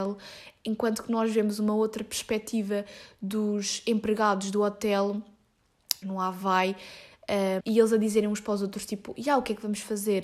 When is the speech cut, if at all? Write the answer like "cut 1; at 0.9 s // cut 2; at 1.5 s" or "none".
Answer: cut 1; at 6.0 s // cut 2; at 7.6 s